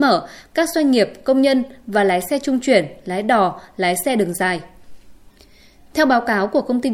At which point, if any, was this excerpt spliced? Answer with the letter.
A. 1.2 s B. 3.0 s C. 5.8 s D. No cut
D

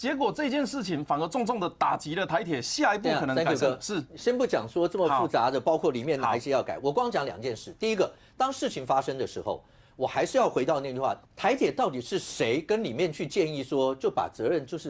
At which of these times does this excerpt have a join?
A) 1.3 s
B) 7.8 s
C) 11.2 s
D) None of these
C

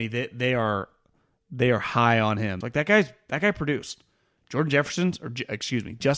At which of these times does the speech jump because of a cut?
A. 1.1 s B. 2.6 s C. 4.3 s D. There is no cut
B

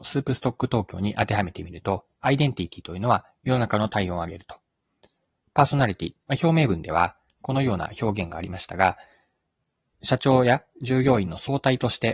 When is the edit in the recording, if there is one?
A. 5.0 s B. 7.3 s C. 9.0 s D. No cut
B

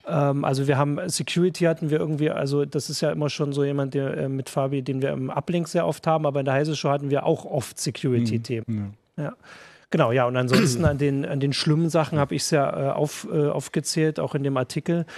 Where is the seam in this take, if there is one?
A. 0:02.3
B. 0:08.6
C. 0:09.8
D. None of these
B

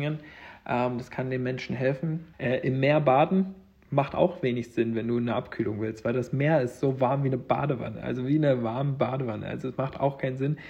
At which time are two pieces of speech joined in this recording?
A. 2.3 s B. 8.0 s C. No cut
A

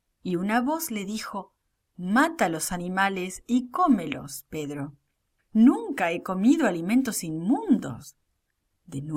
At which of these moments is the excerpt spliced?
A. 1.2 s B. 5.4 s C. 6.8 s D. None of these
B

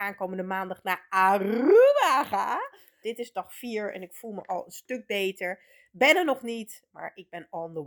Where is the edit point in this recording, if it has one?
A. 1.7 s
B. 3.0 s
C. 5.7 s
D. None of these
B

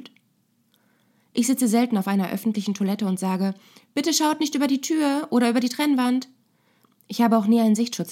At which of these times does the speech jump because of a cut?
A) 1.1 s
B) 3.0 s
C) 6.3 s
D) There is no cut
D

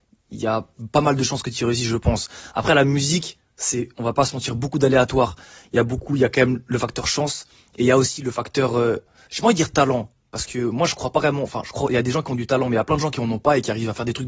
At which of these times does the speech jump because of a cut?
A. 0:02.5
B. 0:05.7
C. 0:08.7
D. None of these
D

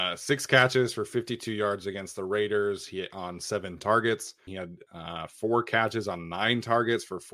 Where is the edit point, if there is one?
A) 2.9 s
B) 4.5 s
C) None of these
B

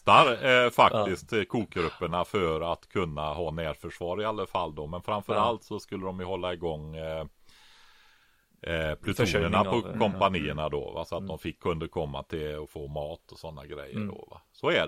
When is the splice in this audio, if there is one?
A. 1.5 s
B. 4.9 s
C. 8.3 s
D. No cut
D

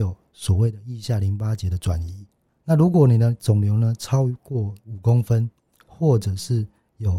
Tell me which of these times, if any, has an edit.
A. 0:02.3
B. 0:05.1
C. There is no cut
C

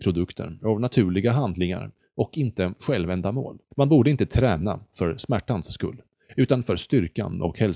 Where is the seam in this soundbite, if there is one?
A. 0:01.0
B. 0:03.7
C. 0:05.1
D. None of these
B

